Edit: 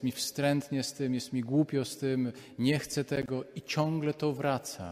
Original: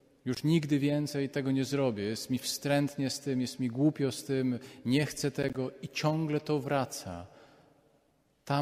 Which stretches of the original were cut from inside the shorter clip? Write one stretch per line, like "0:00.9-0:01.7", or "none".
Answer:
none